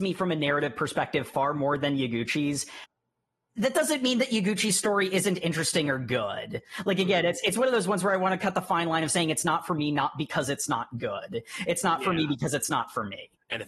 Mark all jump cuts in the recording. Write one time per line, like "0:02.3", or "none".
none